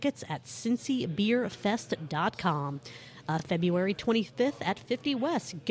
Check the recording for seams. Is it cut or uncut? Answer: uncut